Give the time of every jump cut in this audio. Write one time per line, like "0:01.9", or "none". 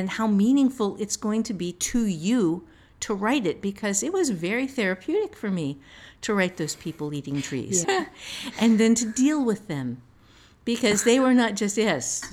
0:07.8